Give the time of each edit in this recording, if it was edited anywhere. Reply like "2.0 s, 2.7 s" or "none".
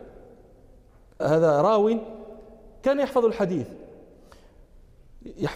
1.2 s